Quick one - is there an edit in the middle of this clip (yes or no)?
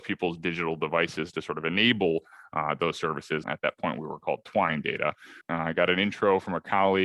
yes